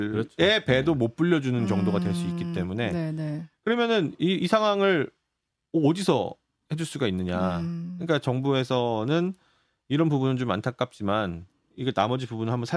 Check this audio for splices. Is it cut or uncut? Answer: uncut